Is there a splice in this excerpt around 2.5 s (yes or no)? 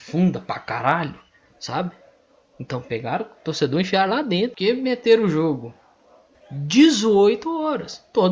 no